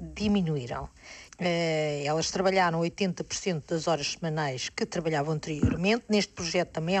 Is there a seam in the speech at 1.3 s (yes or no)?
yes